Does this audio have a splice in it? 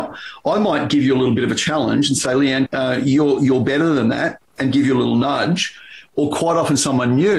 yes; 1 cut; at 2.7 s

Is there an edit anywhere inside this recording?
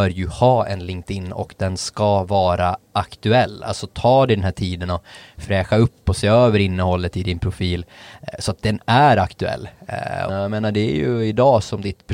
yes; 1 cut; at 10.3 s

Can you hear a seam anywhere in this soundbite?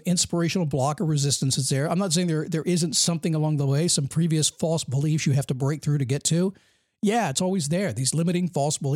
no; 0 cuts

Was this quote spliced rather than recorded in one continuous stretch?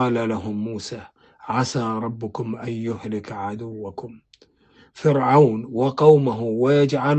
no; 0 cuts

